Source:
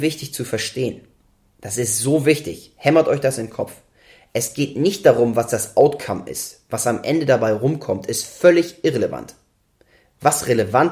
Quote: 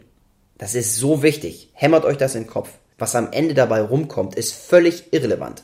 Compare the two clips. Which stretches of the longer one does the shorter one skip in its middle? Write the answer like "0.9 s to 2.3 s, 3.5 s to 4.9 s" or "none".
4.0 s to 6.6 s